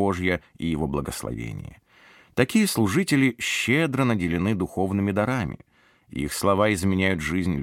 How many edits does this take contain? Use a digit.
0